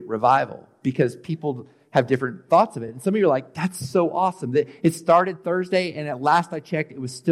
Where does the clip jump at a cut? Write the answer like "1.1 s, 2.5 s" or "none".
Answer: none

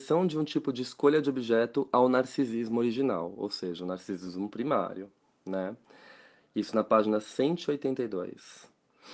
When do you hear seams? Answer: none

